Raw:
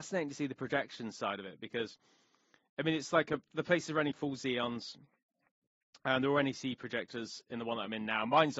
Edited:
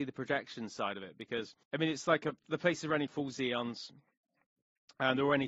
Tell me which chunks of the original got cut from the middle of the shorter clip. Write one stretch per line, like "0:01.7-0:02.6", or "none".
0:02.1-0:02.7